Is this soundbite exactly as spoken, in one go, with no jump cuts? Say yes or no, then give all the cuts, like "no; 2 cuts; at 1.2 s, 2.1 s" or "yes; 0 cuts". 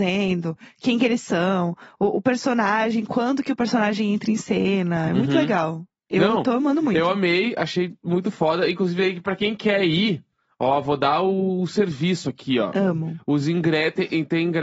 yes; 0 cuts